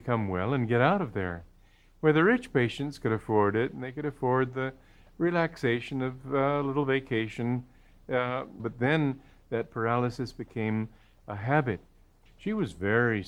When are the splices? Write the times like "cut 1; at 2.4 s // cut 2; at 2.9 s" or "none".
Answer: cut 1; at 8.6 s // cut 2; at 12.3 s